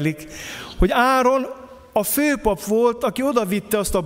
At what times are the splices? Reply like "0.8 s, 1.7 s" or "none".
none